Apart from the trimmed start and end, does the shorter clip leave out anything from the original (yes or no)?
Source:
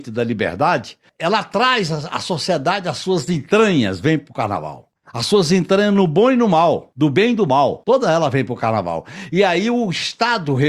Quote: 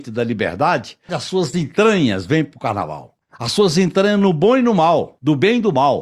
yes